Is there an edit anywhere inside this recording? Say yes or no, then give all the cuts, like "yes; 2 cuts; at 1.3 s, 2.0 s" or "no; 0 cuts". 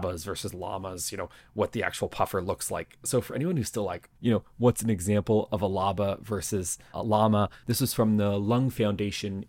yes; 2 cuts; at 4.2 s, 7.6 s